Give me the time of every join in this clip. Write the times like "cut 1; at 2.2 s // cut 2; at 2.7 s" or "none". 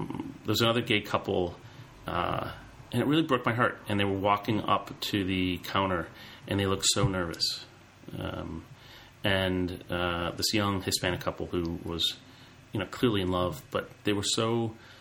none